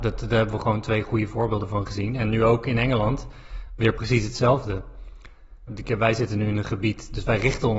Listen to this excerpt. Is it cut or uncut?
cut